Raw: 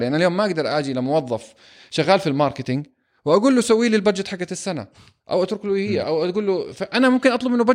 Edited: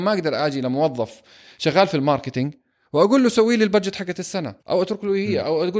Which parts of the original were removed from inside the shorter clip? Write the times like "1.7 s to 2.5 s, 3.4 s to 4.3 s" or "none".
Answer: 4.9 s to 5.2 s